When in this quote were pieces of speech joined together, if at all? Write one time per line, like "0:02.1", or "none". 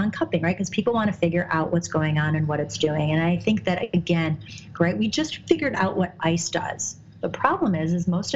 0:04.7
0:07.2